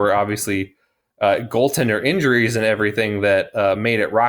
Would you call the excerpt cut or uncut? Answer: uncut